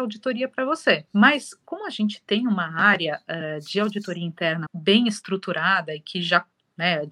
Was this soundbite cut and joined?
yes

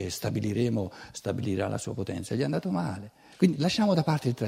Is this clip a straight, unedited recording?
yes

